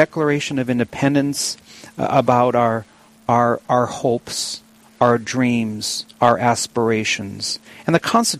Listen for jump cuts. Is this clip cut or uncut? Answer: uncut